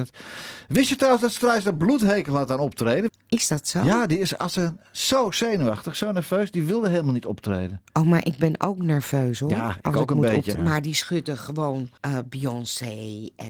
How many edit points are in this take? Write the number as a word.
three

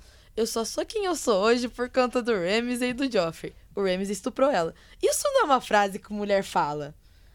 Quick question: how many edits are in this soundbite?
zero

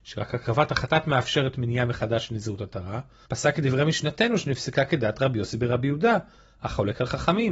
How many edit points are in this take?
one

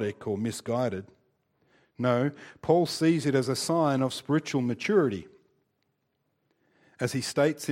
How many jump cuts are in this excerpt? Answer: zero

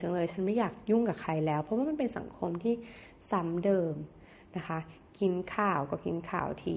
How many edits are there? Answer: zero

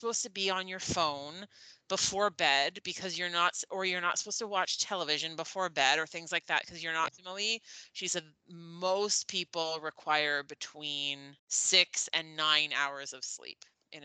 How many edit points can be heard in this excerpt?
two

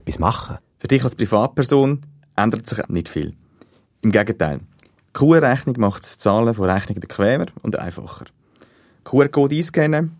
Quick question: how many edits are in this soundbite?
one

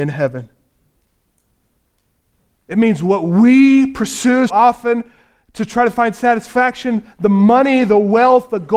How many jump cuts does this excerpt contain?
one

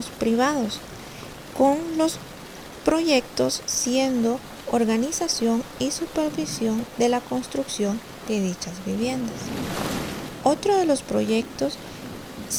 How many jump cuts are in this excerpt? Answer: zero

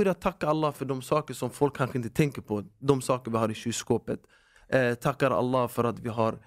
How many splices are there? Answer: zero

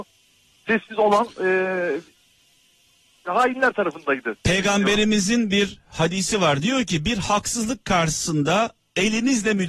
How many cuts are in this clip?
one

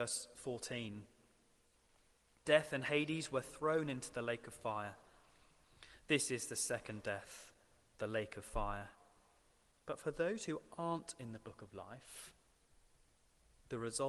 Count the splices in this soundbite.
two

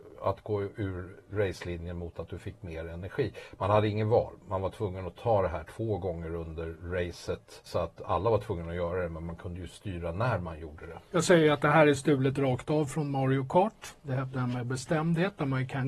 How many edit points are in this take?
zero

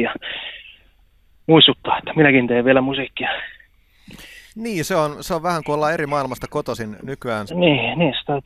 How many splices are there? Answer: two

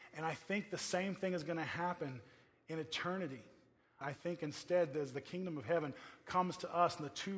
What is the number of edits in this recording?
one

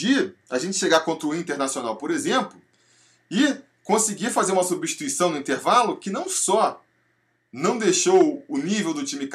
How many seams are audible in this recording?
zero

